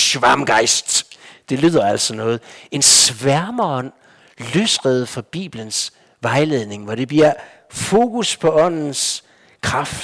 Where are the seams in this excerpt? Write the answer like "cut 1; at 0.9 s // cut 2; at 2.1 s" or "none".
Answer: none